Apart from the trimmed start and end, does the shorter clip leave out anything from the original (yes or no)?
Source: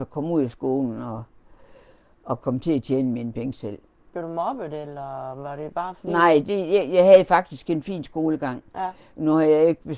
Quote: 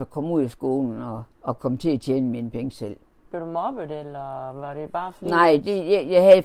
yes